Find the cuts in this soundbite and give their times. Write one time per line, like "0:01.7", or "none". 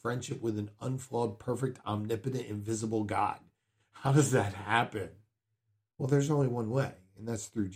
none